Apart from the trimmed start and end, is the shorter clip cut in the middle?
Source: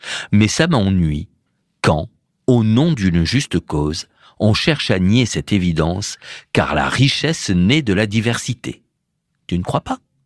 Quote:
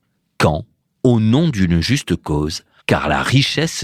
yes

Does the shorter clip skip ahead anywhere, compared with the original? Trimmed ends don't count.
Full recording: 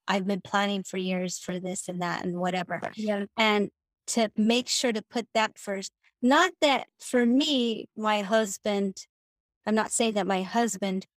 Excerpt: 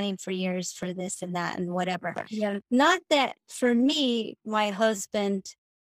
yes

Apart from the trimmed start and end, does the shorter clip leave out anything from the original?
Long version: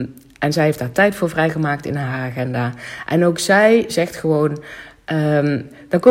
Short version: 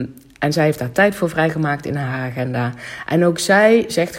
no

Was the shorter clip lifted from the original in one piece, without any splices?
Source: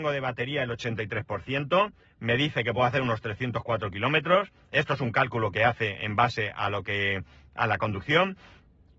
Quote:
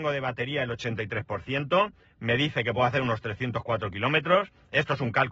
yes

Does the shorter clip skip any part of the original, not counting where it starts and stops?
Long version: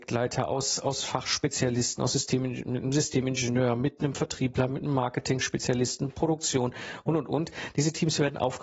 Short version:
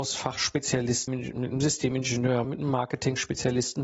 yes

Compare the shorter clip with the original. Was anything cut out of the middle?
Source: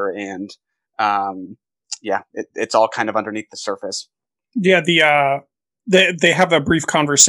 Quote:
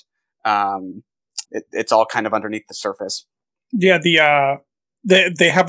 yes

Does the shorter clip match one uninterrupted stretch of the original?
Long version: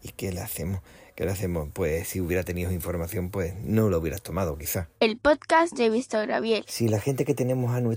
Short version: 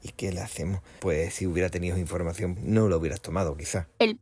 no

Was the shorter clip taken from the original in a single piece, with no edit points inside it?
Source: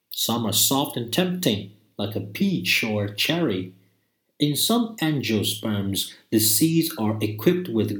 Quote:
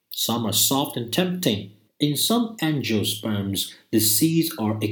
no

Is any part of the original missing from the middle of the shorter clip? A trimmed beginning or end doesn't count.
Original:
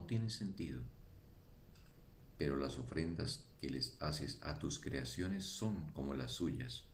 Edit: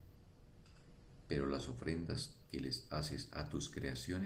no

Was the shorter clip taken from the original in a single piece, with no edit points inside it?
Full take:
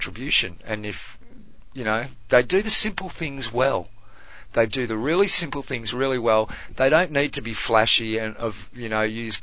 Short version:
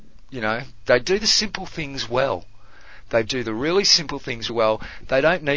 no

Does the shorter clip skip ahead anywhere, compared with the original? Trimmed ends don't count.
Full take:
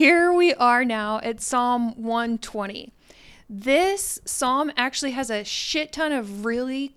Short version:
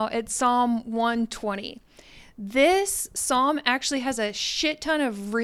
no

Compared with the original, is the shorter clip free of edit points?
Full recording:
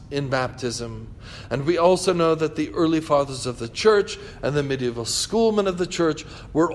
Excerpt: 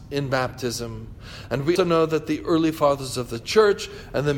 no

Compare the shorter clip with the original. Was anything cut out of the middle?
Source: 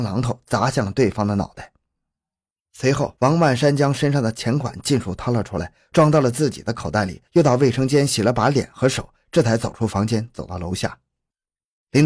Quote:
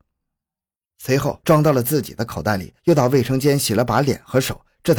yes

